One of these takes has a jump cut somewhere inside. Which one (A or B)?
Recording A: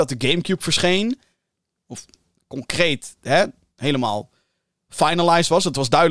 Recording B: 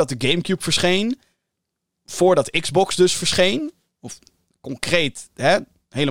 A